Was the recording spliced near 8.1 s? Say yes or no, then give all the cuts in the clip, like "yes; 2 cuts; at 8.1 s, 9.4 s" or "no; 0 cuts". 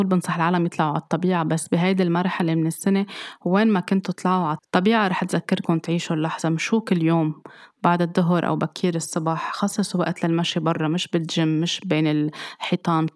no; 1 cut; at 4.6 s